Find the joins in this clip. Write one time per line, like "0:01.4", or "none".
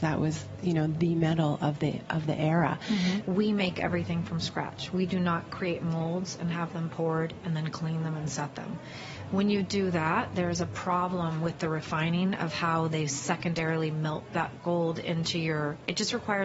0:03.2
0:12.9